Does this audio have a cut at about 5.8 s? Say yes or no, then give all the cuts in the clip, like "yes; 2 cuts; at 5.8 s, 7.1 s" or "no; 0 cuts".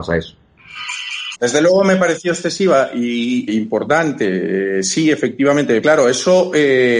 yes; 3 cuts; at 1.3 s, 3.5 s, 5.8 s